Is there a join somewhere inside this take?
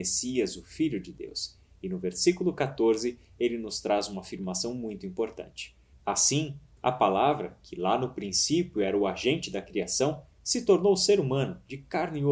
no; 0 cuts

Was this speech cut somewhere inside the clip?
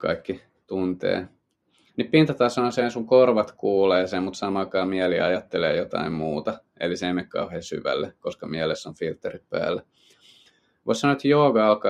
no; 0 cuts

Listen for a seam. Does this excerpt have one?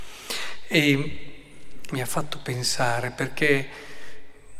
yes; 1 cut; at 1.9 s

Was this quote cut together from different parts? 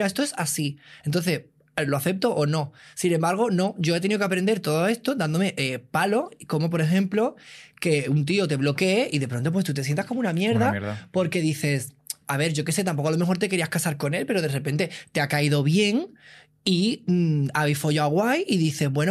no; 0 cuts

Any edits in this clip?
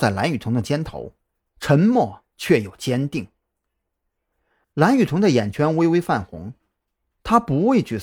yes; 1 cut; at 4.6 s

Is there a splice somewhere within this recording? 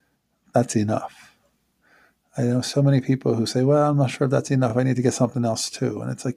no; 0 cuts

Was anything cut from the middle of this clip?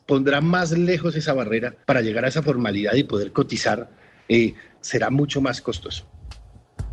yes; 2 cuts; at 1.8 s, 4.8 s

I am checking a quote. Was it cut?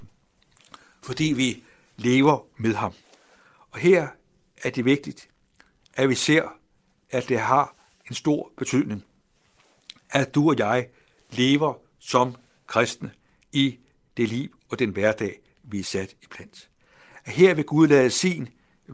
no; 0 cuts

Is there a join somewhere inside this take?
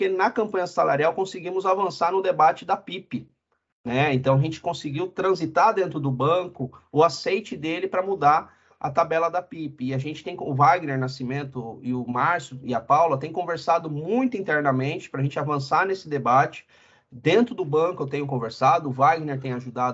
no; 0 cuts

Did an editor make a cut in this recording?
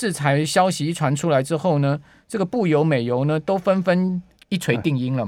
yes; 1 cut; at 4.4 s

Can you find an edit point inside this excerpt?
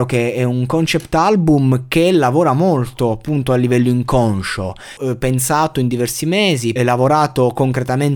yes; 2 cuts; at 5.0 s, 6.8 s

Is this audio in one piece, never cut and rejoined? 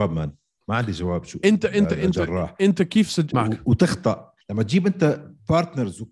no; 2 cuts; at 3.3 s, 4.4 s

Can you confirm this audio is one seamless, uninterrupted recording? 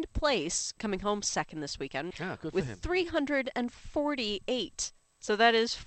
no; 1 cut; at 2.1 s

